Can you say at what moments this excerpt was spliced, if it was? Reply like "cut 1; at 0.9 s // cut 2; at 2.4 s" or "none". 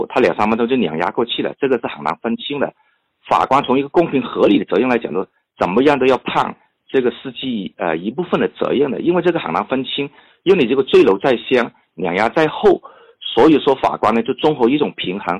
none